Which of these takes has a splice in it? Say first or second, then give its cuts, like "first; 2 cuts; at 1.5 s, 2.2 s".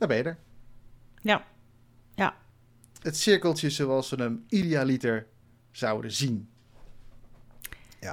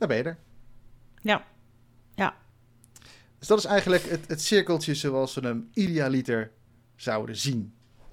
first; 1 cut; at 3.0 s